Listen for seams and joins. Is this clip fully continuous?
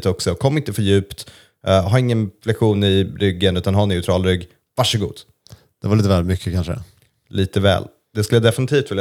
yes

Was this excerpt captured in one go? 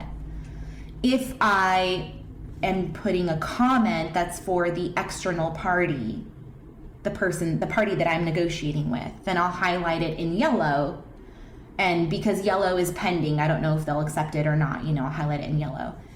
yes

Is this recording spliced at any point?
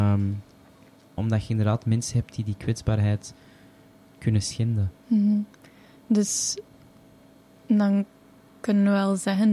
yes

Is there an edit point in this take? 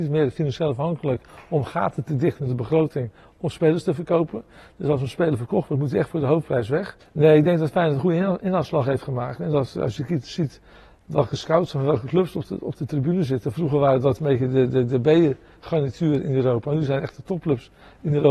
no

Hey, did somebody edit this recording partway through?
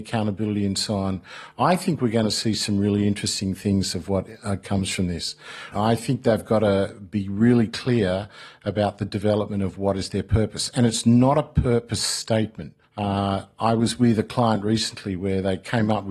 yes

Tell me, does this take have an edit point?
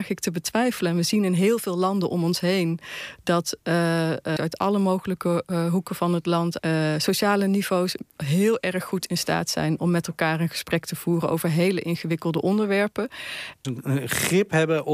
yes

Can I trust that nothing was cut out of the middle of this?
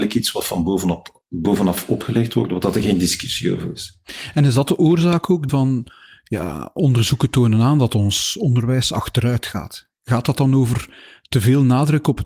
no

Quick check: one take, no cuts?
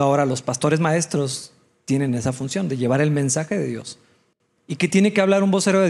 yes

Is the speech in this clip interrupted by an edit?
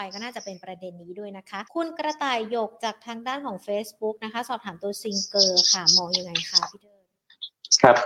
yes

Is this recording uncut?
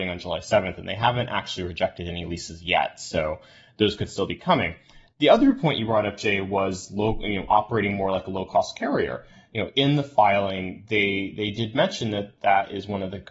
yes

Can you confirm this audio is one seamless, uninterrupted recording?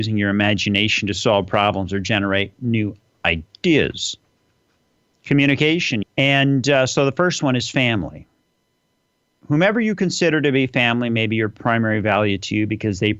no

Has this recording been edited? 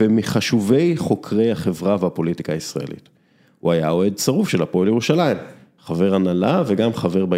no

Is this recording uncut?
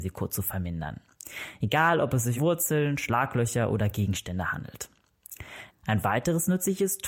no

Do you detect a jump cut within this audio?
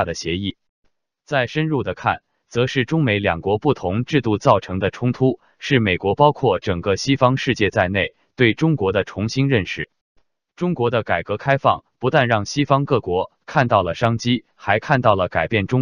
no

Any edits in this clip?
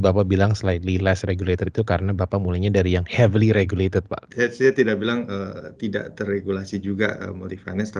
yes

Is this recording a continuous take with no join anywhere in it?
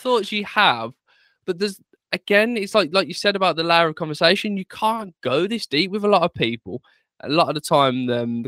yes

